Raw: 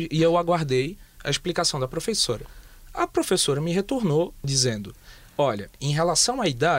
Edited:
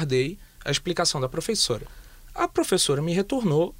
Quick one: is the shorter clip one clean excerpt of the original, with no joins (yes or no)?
yes